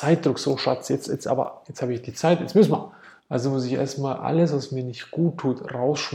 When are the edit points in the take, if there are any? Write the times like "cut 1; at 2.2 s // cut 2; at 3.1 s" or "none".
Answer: cut 1; at 1.6 s // cut 2; at 3.2 s